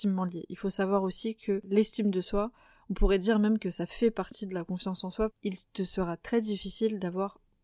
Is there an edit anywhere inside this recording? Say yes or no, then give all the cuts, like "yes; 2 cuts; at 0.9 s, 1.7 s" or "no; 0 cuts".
yes; 1 cut; at 5.3 s